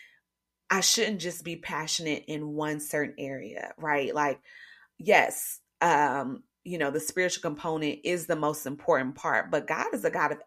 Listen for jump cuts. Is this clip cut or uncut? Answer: cut